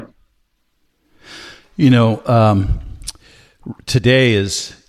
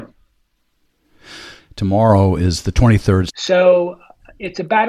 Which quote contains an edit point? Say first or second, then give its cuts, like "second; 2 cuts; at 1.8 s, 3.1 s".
second; 2 cuts; at 1.6 s, 3.3 s